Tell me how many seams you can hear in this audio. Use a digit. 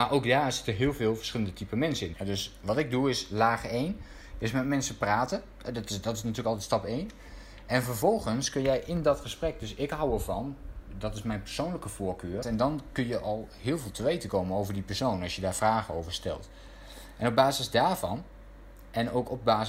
2